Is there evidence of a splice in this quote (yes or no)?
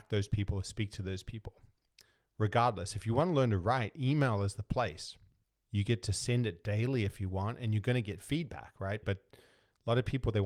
yes